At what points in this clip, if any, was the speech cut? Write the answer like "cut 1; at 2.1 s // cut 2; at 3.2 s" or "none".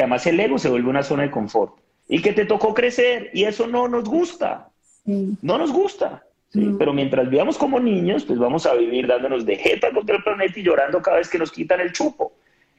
cut 1; at 2.0 s